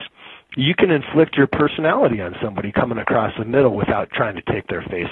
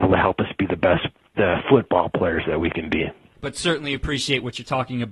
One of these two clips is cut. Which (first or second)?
second